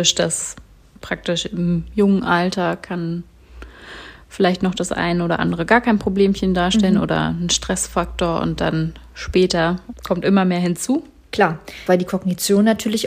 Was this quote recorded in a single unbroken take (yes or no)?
no